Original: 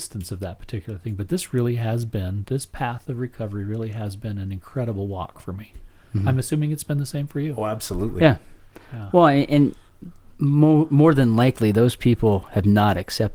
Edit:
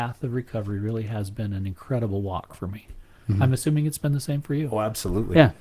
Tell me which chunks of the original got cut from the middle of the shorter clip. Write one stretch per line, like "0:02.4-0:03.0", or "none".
none